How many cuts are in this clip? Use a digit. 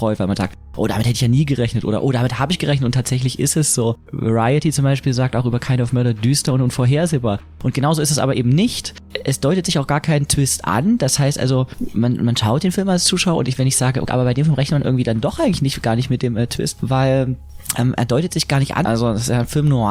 2